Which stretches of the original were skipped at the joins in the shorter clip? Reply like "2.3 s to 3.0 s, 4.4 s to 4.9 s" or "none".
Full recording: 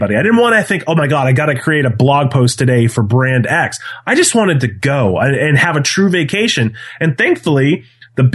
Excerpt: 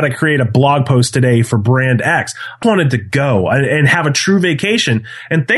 4.1 s to 4.3 s